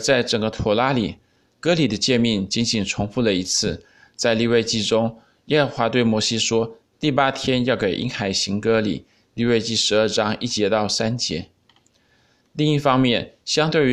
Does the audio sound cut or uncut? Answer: uncut